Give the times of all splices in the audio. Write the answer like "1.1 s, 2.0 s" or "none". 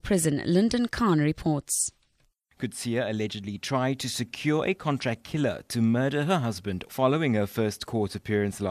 6.9 s